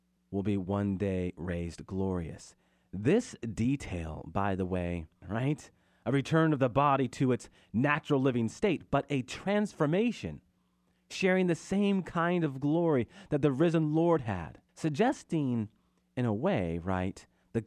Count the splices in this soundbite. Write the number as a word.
two